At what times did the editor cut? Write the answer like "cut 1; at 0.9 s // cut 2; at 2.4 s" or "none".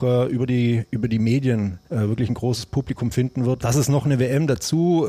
cut 1; at 1.8 s // cut 2; at 3.6 s